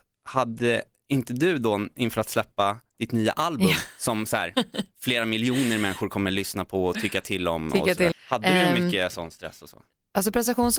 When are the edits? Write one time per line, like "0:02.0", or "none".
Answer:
0:08.1